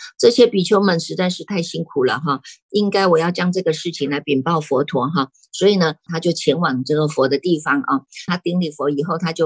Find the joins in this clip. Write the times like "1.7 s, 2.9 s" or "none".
6.1 s, 8.3 s